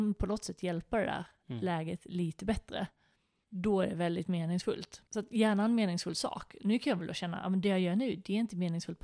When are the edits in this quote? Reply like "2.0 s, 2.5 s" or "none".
5.1 s